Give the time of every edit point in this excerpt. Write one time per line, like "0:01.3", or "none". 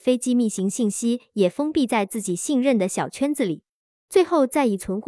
0:04.0